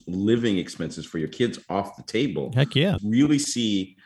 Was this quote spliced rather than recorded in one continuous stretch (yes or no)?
yes